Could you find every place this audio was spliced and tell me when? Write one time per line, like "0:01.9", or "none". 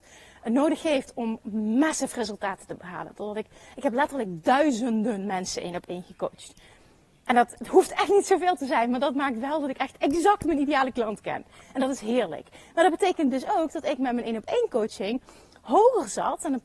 none

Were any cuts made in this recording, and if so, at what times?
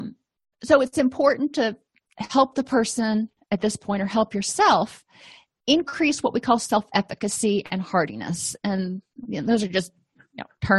none

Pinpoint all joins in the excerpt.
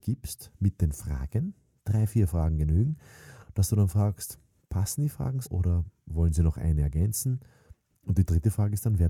0:05.4

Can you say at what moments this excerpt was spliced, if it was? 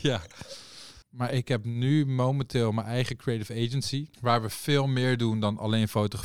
0:01.0
0:04.1

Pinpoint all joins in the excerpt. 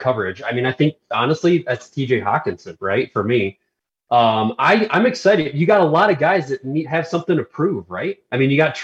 none

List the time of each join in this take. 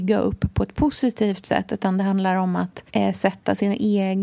0:02.9

